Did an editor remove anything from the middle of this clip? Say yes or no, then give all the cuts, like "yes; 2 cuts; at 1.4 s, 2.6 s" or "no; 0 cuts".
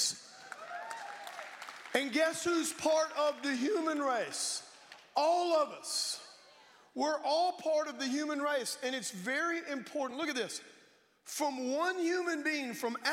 no; 0 cuts